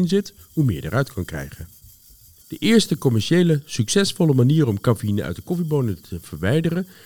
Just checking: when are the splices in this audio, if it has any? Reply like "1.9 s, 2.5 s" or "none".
2.4 s